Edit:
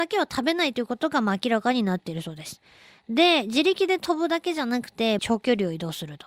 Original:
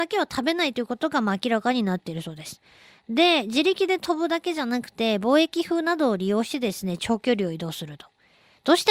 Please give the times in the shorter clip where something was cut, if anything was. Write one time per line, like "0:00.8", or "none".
0:05.2